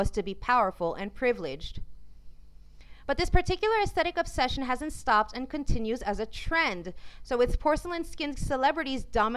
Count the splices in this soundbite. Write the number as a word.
zero